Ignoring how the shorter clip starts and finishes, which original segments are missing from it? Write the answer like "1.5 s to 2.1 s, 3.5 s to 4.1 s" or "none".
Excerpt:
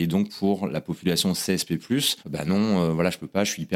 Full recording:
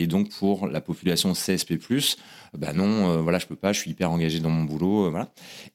2.2 s to 2.5 s